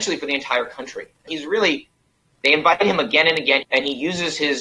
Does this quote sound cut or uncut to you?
cut